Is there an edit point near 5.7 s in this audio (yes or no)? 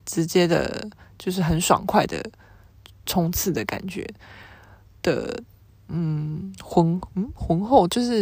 yes